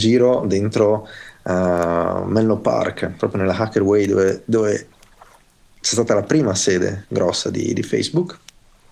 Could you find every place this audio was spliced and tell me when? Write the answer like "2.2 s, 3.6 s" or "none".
none